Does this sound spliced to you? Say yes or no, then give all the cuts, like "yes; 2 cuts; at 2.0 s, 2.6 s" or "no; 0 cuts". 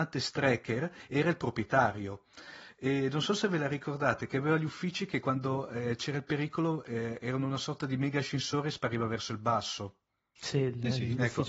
no; 0 cuts